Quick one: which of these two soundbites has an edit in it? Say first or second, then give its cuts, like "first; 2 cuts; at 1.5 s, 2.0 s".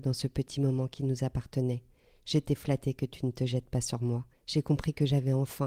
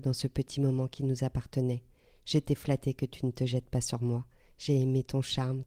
first; 1 cut; at 4.3 s